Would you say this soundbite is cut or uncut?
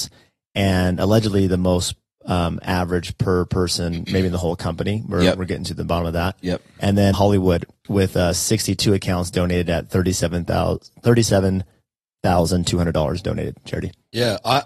cut